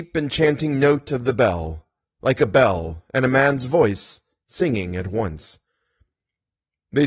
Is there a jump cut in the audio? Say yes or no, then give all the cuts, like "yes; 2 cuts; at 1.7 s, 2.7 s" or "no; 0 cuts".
no; 0 cuts